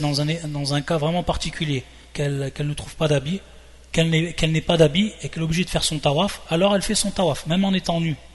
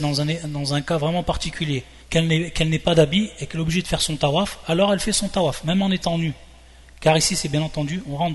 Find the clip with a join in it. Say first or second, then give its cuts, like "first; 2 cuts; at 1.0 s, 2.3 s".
second; 1 cut; at 2.0 s